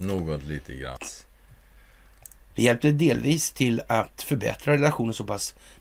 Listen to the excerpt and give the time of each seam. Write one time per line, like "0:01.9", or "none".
0:01.0
0:02.5